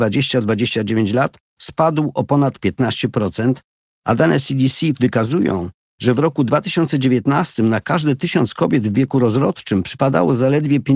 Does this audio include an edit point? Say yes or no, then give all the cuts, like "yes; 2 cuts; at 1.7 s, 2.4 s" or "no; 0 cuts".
no; 0 cuts